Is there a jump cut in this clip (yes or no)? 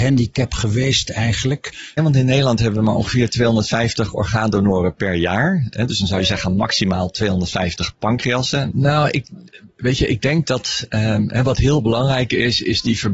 yes